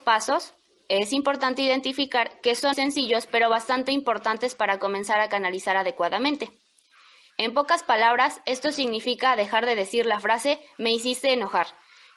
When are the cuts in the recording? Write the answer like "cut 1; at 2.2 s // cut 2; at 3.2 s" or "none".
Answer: cut 1; at 2.7 s // cut 2; at 7.3 s